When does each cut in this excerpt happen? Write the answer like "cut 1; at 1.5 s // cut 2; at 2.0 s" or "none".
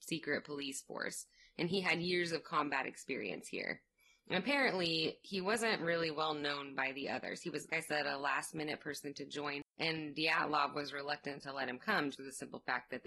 cut 1; at 7.7 s // cut 2; at 9.7 s // cut 3; at 12.1 s